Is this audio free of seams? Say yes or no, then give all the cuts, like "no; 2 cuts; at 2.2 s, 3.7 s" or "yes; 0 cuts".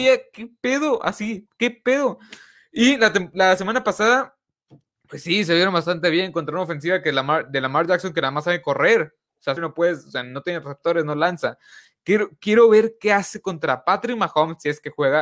no; 1 cut; at 9.6 s